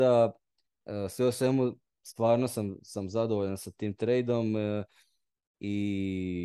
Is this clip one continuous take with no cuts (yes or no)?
yes